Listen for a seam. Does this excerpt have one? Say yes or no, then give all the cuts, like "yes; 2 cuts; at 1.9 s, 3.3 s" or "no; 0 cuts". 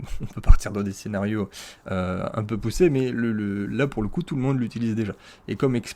no; 0 cuts